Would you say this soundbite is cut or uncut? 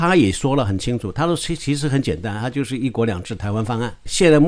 uncut